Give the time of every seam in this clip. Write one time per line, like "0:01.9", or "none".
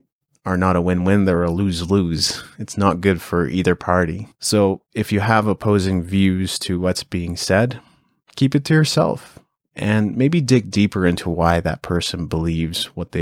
none